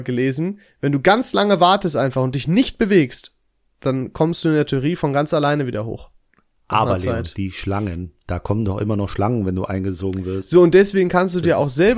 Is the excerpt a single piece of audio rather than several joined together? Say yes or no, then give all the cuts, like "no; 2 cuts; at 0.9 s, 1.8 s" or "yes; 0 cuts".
yes; 0 cuts